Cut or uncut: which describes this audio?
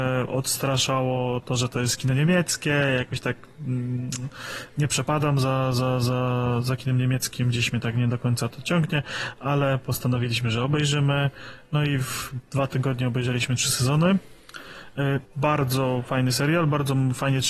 cut